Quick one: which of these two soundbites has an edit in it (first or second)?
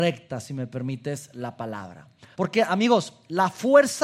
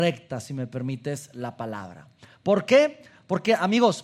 first